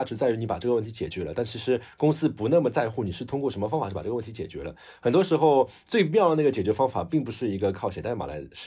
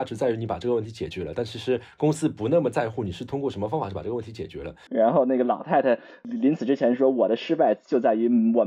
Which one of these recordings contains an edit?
second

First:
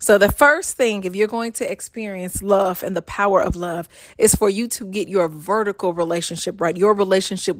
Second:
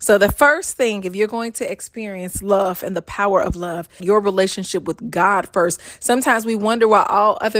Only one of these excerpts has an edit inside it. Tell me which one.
second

